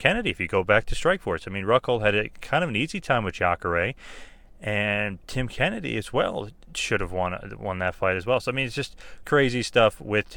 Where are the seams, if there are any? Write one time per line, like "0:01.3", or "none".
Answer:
0:05.2
0:09.2